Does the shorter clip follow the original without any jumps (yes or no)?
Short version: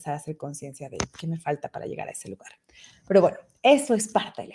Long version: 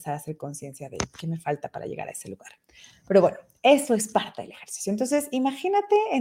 yes